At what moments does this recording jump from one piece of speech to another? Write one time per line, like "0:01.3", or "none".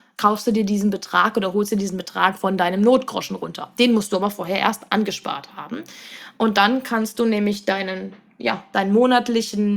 none